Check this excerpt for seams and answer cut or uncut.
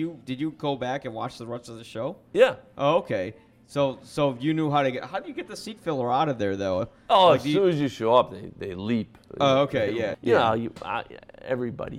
cut